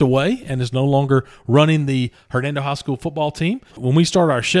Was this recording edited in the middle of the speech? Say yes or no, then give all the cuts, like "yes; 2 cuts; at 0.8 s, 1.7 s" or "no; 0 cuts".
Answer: yes; 1 cut; at 3.7 s